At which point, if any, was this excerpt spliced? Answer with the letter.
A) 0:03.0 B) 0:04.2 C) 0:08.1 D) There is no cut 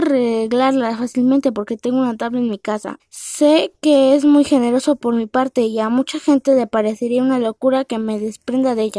A